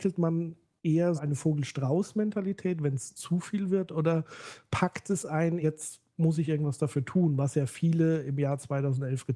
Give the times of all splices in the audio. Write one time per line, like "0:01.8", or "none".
0:01.2
0:05.6